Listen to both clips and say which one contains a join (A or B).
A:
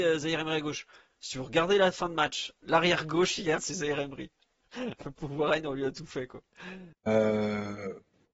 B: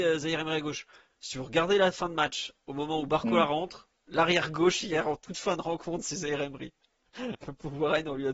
A